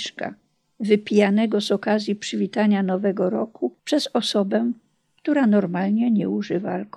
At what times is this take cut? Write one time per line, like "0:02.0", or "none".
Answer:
0:03.8